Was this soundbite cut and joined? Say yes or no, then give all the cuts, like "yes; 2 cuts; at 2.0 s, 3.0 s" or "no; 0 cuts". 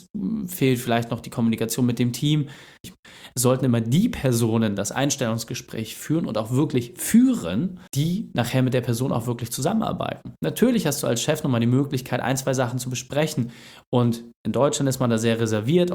yes; 2 cuts; at 2.8 s, 7.9 s